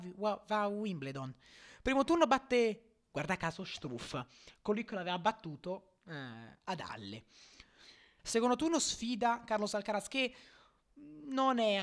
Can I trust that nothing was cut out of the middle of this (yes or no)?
no